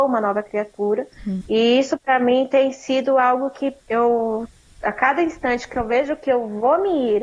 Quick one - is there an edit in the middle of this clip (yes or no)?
yes